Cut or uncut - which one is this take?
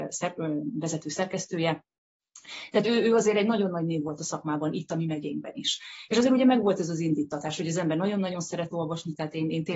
uncut